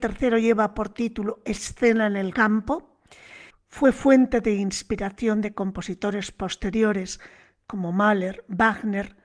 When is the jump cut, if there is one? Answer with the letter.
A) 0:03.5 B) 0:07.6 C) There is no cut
A